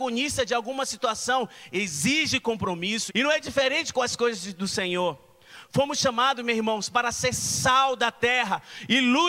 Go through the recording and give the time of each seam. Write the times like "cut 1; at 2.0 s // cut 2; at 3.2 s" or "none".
cut 1; at 3.1 s